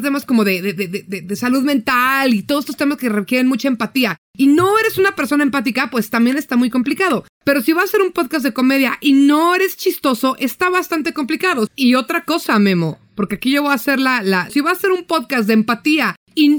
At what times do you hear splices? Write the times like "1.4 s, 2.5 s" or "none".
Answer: 7.3 s, 11.7 s, 14.5 s